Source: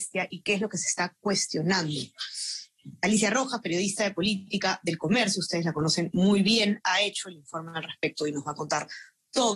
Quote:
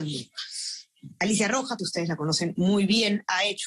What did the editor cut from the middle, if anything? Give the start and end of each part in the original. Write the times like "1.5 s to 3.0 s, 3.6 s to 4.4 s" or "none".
3.6 s to 5.4 s